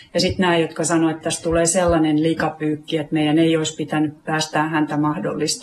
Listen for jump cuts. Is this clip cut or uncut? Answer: uncut